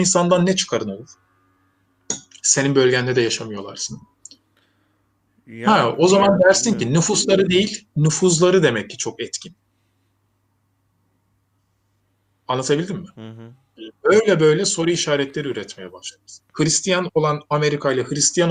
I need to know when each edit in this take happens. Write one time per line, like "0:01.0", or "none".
0:16.4